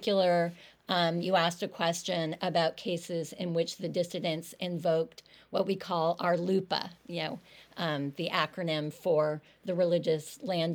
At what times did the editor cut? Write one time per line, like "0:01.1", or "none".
none